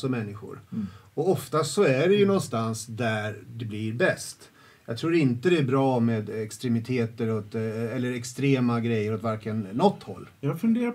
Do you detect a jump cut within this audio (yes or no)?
no